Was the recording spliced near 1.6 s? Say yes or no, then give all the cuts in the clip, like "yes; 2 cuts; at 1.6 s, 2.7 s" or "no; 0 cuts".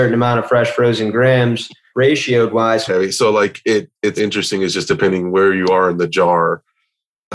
no; 2 cuts; at 2.9 s, 4.2 s